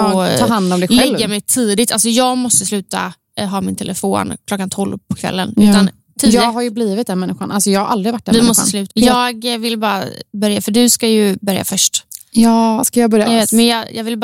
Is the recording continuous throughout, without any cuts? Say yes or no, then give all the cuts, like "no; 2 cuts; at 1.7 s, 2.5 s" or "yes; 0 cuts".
no; 2 cuts; at 8.9 s, 13.2 s